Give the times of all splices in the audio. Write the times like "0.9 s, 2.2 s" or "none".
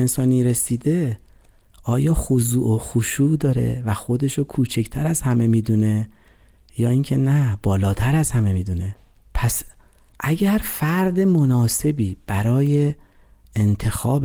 none